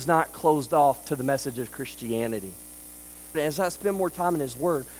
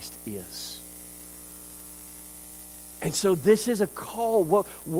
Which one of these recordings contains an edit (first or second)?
first